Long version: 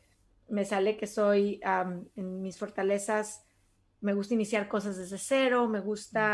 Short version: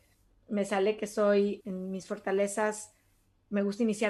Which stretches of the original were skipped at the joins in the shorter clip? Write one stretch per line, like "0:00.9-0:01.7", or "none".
0:01.6-0:02.1